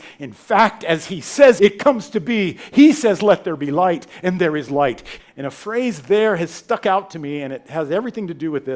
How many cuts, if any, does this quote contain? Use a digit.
2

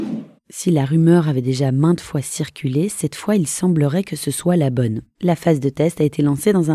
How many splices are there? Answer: 1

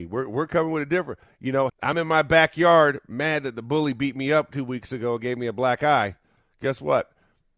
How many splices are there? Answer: 1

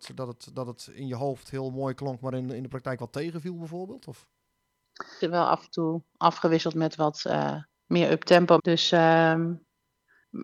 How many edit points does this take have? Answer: 2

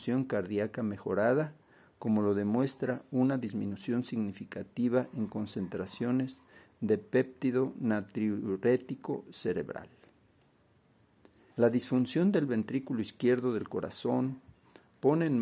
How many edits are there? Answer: 1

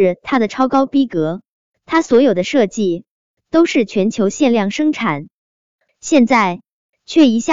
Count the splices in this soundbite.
1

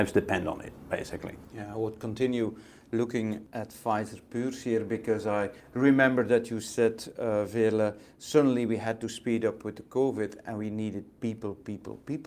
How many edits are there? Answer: 1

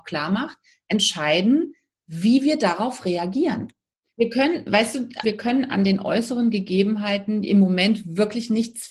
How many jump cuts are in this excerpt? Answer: 2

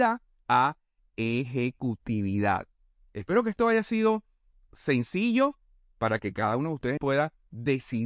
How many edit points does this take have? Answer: 1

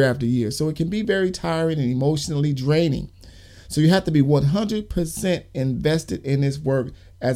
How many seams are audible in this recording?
0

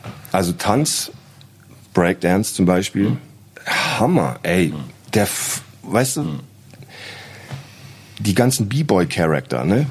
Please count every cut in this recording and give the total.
0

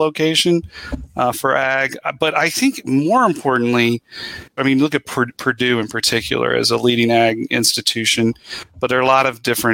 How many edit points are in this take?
1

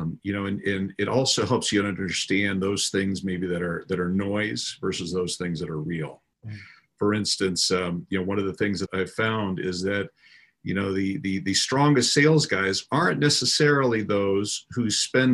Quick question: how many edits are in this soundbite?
2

